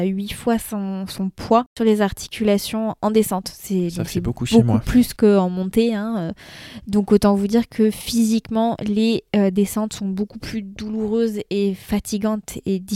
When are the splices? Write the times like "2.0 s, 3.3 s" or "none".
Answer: none